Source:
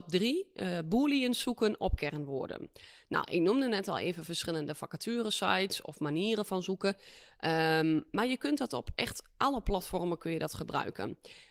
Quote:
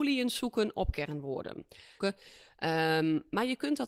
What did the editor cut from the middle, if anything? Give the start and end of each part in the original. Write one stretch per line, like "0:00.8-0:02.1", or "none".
0:03.0-0:06.8